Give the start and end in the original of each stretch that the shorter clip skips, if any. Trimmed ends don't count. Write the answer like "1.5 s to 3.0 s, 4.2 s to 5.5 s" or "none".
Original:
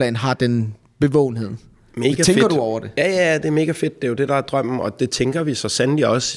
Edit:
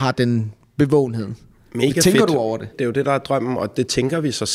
2.9 s to 3.9 s